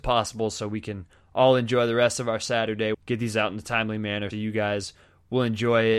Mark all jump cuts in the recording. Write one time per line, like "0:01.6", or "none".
0:02.9
0:04.3

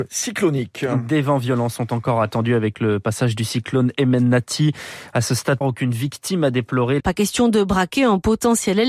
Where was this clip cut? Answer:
0:05.6
0:07.0

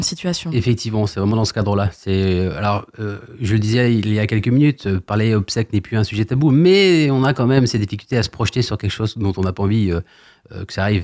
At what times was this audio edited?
none

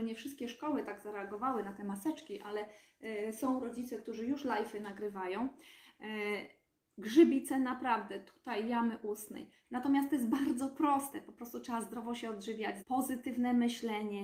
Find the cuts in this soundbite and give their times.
0:09.6
0:12.8

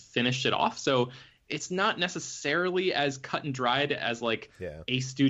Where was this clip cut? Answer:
none

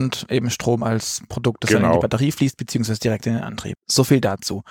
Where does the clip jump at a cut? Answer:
0:03.8

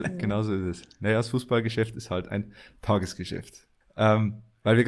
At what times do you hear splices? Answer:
0:03.8

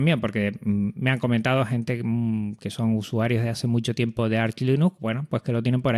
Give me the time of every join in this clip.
none

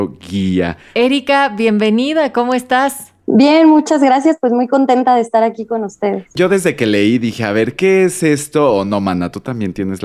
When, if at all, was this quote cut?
none

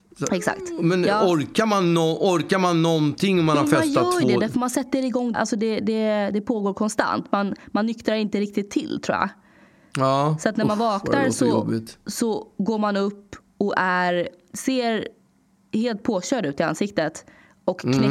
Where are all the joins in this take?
0:05.3

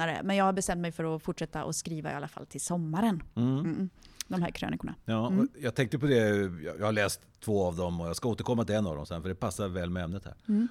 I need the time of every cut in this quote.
none

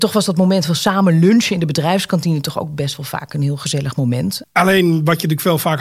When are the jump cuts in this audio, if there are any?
0:04.4

